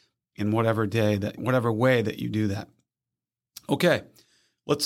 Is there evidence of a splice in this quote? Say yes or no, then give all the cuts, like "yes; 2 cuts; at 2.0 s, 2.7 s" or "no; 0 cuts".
yes; 1 cut; at 1.4 s